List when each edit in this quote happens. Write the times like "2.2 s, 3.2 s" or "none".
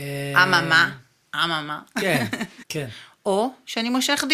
2.6 s